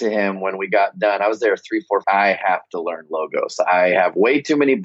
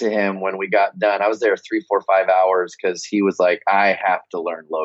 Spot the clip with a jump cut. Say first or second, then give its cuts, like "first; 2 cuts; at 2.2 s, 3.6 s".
first; 1 cut; at 2.0 s